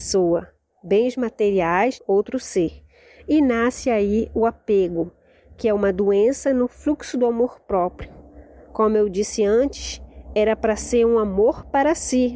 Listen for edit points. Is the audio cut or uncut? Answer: cut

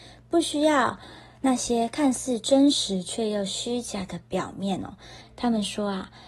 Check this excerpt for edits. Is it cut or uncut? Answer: cut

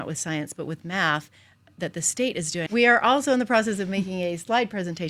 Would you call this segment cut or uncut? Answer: cut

